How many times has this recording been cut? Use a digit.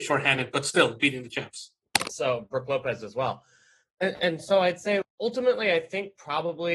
2